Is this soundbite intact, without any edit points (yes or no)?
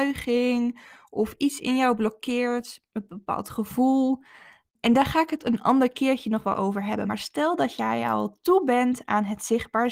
yes